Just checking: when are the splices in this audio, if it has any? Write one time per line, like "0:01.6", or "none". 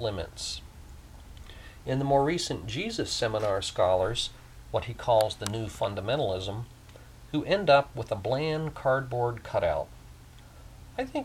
0:01.8

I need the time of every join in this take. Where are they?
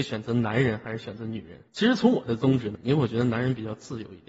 0:01.7
0:02.8

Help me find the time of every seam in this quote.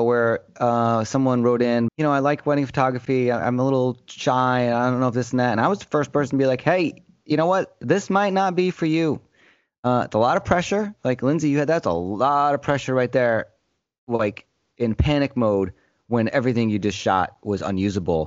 0:01.9

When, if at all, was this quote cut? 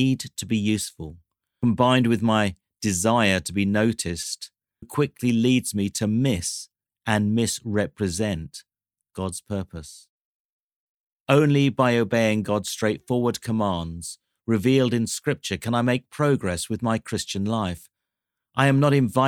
0:04.8

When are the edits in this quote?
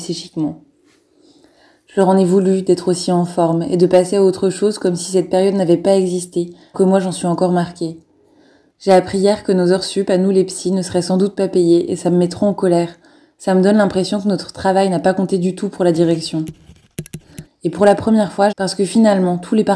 0:06.7
0:17.5
0:18.5

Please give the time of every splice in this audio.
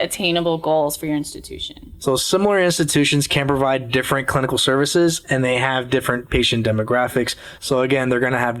0:07.6

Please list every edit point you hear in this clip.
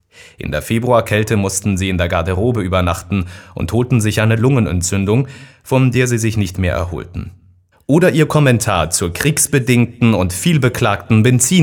0:07.7

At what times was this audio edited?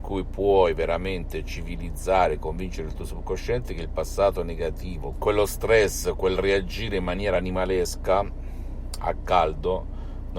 0:05.1

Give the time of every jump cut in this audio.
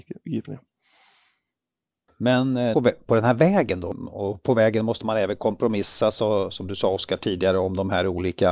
0:02.7

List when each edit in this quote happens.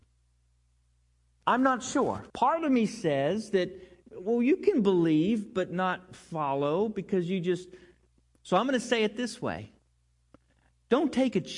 0:02.3
0:08.2

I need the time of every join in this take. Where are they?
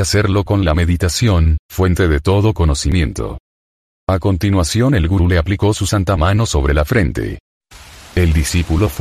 0:03.9

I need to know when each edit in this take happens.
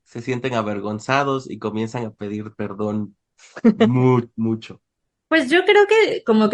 none

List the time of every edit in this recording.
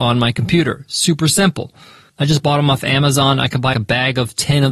0:02.1
0:03.7

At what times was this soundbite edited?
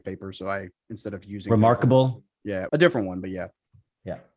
0:02.7

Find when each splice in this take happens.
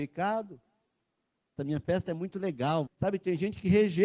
0:01.6
0:02.9

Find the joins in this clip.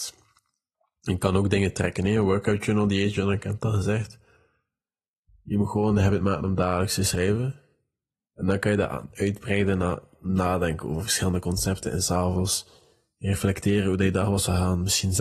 none

